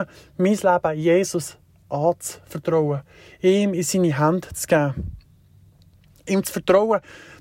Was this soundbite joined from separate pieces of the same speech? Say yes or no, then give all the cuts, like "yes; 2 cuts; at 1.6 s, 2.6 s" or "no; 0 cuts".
no; 0 cuts